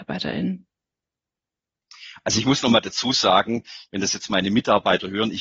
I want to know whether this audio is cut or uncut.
uncut